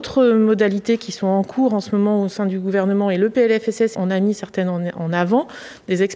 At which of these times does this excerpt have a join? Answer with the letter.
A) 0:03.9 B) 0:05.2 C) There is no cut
A